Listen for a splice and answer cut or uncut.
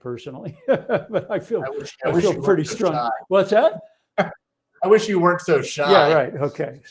uncut